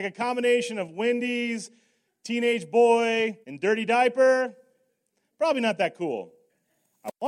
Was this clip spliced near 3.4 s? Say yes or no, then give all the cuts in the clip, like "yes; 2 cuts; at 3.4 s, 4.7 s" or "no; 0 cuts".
yes; 1 cut; at 3.4 s